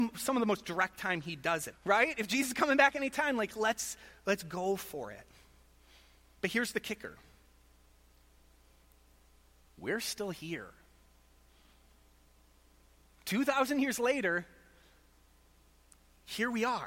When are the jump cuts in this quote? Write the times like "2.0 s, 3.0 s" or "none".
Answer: 1.7 s

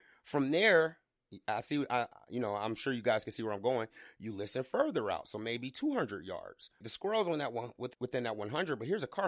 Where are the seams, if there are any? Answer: 6.8 s, 7.9 s

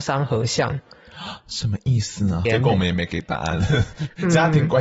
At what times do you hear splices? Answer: 2.4 s

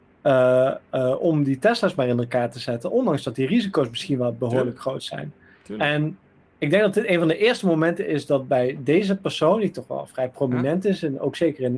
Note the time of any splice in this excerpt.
none

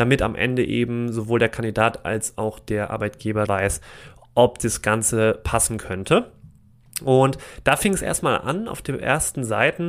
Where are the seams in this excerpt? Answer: 3.5 s

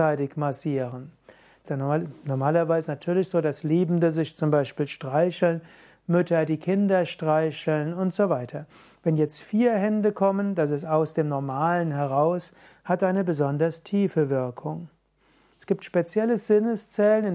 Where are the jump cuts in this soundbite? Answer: 1.6 s, 15.5 s

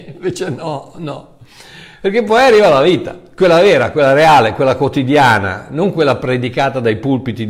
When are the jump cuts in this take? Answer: none

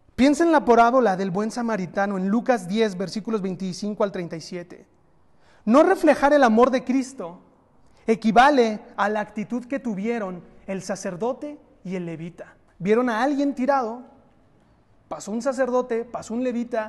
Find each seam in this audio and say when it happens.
12.7 s

